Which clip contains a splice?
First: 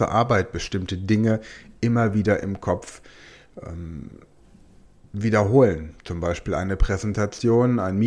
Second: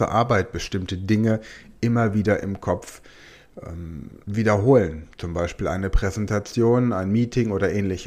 second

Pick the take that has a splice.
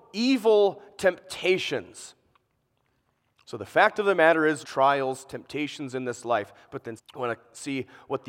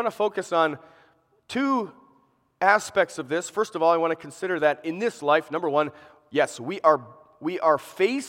first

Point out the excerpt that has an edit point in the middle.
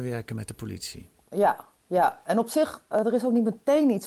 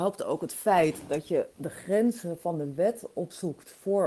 first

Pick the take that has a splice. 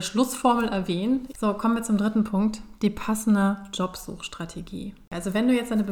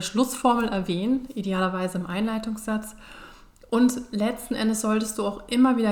first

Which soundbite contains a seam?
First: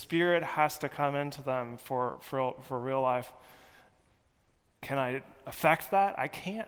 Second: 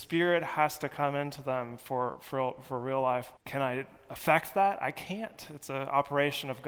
second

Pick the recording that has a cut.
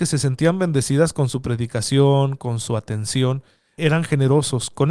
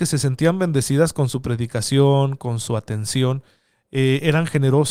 first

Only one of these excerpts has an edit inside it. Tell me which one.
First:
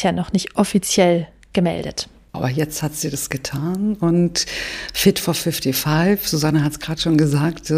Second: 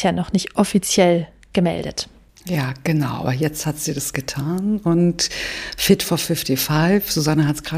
first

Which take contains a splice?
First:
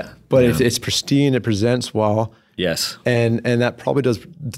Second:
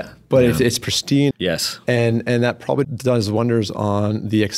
second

